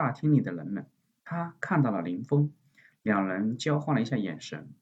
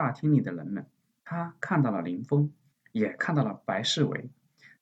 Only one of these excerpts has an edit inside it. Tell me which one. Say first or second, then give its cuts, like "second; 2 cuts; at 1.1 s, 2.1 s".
second; 1 cut; at 2.7 s